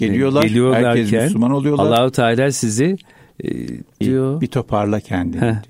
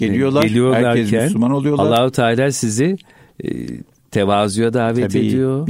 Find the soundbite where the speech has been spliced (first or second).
first